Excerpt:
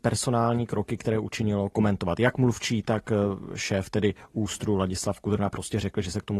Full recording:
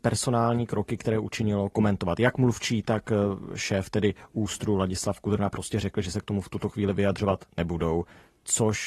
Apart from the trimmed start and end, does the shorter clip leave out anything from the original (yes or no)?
no